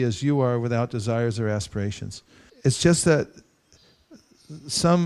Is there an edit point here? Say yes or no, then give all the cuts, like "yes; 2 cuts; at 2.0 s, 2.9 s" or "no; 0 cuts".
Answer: yes; 1 cut; at 2.5 s